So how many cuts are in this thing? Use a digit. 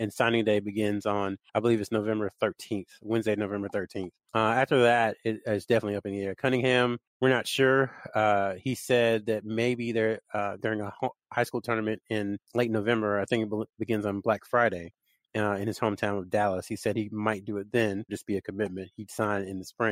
1